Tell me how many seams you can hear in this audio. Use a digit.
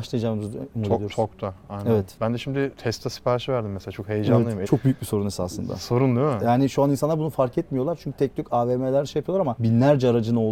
1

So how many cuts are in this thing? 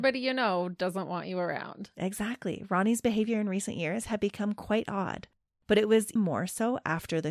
1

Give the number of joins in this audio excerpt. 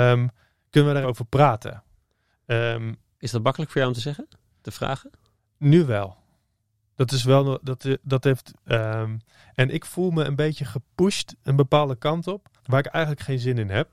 3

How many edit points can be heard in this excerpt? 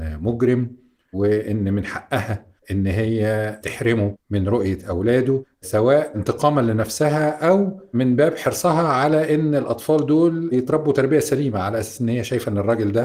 1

